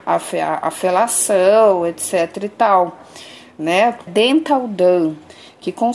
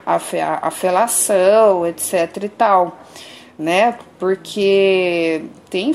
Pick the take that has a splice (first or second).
first